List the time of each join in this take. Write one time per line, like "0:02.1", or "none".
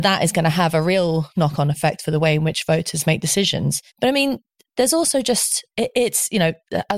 0:03.9